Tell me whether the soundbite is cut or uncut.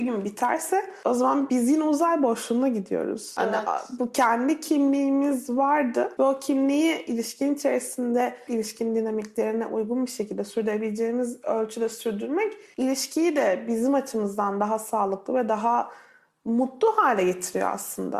uncut